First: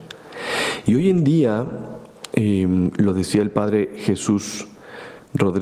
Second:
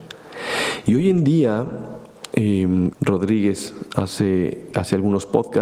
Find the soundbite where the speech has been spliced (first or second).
second